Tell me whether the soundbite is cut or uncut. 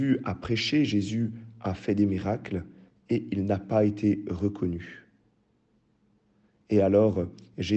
uncut